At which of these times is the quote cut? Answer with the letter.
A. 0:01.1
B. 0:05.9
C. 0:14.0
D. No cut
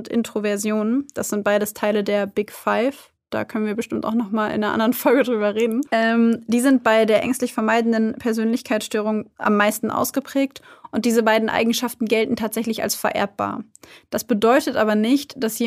B